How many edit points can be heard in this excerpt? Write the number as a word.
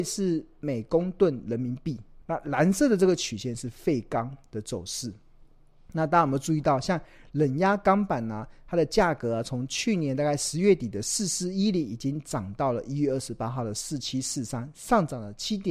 one